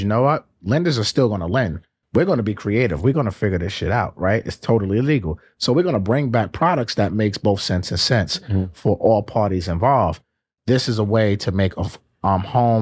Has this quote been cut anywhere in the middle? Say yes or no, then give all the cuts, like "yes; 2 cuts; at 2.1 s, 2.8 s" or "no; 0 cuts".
no; 0 cuts